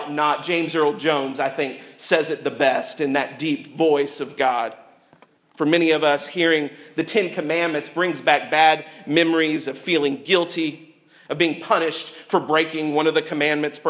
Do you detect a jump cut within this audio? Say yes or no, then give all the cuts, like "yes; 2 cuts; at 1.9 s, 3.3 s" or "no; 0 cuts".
no; 0 cuts